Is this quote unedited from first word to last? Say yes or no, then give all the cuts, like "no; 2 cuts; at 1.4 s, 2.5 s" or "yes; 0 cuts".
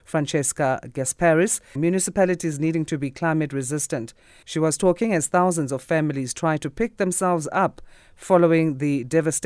no; 2 cuts; at 1.8 s, 4.4 s